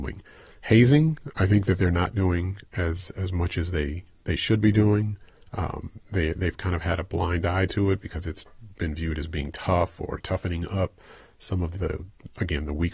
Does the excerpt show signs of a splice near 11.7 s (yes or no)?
yes